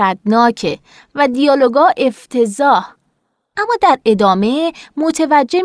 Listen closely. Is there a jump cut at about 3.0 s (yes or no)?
no